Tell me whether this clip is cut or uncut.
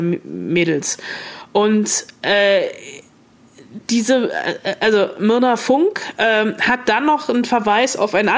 uncut